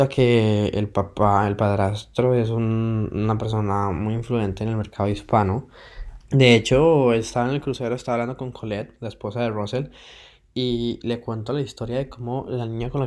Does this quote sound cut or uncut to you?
cut